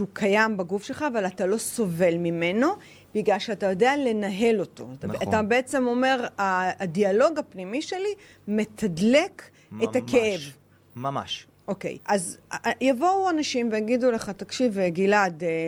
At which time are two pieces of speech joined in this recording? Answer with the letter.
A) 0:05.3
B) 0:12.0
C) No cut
B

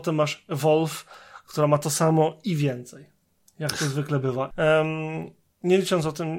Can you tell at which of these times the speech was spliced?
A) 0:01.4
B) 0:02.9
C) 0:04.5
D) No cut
C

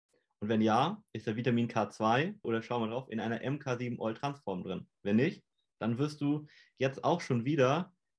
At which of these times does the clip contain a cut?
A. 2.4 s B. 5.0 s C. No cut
A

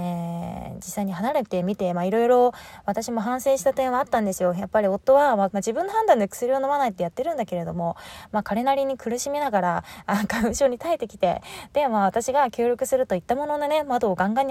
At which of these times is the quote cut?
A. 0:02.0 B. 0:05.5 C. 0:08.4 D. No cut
B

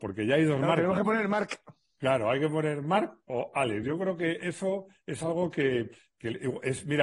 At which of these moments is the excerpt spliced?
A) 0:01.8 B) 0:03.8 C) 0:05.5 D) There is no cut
D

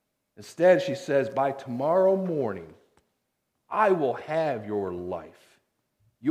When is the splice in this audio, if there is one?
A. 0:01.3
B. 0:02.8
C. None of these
C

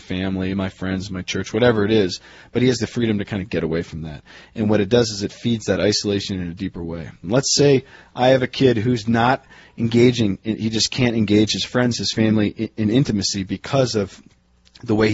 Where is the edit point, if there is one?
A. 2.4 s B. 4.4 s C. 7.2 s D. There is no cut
C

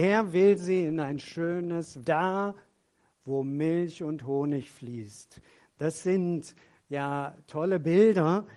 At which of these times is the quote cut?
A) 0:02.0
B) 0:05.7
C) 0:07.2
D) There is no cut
A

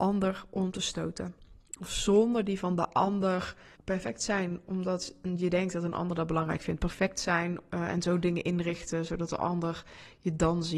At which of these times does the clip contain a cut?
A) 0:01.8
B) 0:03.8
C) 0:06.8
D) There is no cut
B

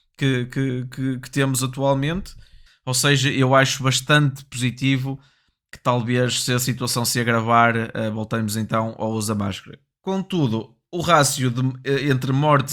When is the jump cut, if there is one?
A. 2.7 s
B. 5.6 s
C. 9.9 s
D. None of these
A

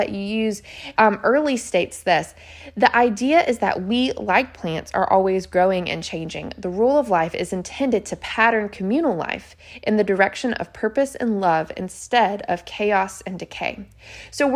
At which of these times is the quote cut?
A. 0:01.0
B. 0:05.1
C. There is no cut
A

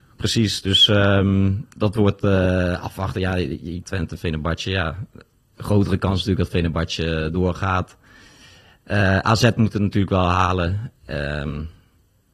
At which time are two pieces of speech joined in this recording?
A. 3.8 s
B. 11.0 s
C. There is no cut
A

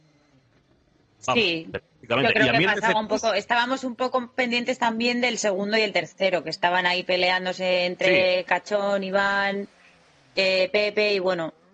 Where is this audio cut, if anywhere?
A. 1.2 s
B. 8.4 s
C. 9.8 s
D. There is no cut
D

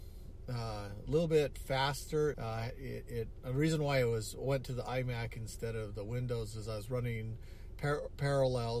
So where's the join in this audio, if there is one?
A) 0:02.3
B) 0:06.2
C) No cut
A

